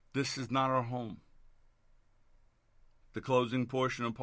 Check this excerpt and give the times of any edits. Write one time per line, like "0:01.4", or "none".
0:03.0